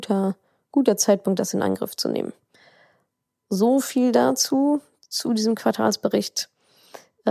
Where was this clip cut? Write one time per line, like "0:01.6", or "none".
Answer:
none

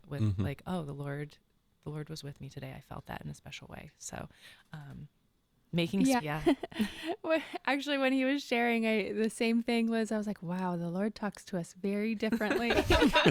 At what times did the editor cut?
0:06.2

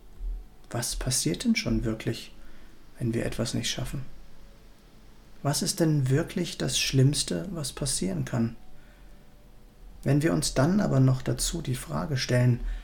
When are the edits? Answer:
0:10.0

